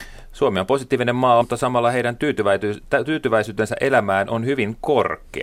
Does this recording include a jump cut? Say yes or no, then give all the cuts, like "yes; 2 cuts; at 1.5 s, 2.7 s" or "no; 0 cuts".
yes; 1 cut; at 1.4 s